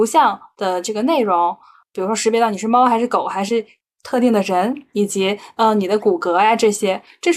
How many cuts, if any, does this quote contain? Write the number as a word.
zero